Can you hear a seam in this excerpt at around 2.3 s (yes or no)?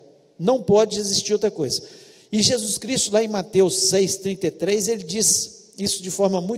no